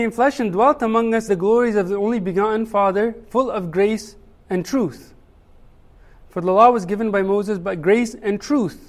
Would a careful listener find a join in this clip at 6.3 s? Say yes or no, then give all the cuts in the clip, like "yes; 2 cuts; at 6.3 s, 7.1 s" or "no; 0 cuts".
no; 1 cut; at 1.3 s